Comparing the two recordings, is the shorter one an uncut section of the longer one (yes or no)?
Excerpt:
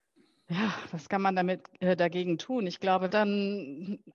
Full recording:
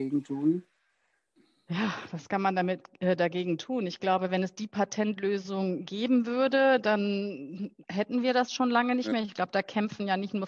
no